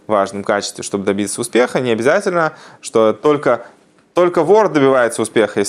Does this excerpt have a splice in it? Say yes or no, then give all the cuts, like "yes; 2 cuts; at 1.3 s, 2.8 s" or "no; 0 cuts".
no; 0 cuts